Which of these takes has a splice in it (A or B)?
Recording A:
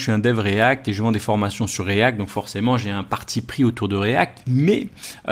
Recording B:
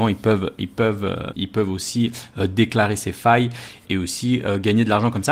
B